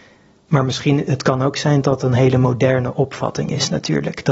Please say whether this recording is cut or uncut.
cut